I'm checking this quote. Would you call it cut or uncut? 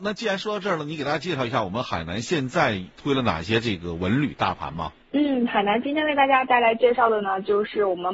cut